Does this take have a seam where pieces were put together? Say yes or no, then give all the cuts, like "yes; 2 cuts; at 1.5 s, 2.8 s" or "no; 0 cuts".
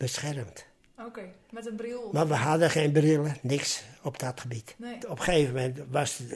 no; 0 cuts